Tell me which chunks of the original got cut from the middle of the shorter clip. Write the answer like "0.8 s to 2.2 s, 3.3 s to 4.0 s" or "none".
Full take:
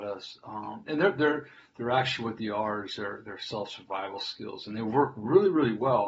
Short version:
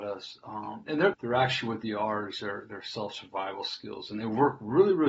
1.1 s to 1.7 s